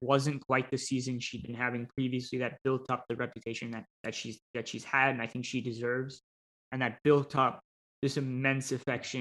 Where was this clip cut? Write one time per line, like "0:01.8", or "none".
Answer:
0:03.9